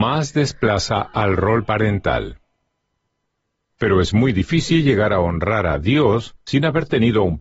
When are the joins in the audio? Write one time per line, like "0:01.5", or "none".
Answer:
0:03.7